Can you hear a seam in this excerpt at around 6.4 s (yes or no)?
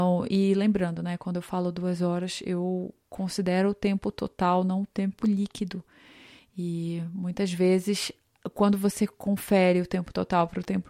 no